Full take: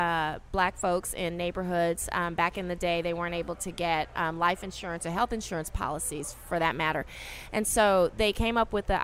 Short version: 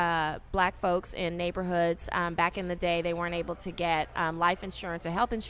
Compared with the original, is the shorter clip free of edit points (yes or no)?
yes